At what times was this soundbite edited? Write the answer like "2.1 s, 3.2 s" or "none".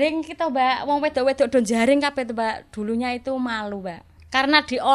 none